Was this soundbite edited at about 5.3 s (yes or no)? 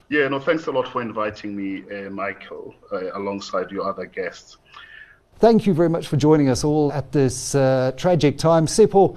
yes